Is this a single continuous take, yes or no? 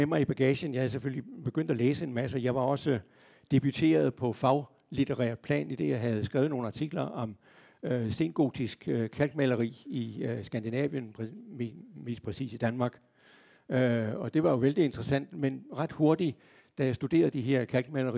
yes